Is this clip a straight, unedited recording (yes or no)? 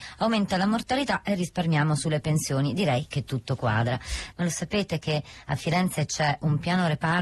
no